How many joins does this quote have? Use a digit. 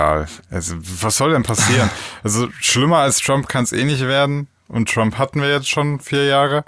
0